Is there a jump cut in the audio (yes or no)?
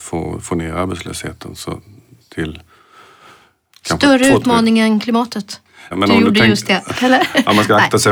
yes